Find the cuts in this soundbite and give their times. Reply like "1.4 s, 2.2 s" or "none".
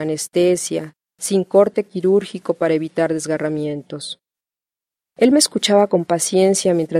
1.1 s